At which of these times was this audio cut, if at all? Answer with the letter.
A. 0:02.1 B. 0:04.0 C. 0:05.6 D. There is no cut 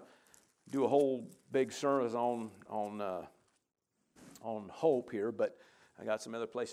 D